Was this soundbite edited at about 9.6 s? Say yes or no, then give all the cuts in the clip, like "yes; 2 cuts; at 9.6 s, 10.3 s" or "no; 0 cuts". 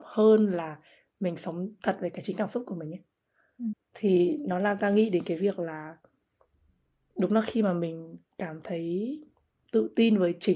no; 1 cut; at 3.7 s